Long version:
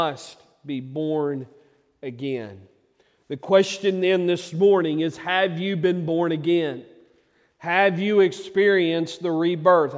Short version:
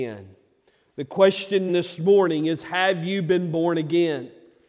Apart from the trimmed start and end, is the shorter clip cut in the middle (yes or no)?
yes